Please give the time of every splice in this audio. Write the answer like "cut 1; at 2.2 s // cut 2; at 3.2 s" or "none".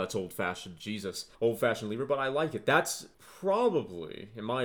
cut 1; at 1.3 s // cut 2; at 3.1 s